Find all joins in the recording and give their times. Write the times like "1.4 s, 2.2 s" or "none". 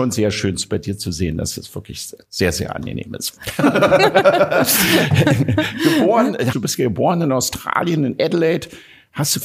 3.4 s, 6.5 s